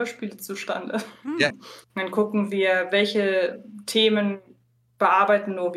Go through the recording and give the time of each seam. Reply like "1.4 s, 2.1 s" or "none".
1.5 s